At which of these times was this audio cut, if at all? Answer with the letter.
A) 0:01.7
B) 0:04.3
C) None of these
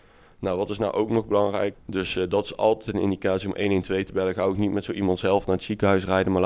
A